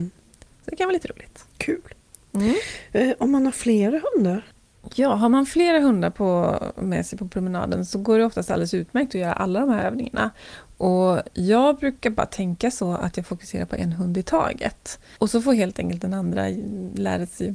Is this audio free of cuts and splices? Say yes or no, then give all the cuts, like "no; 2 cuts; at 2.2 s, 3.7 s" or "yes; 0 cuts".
yes; 0 cuts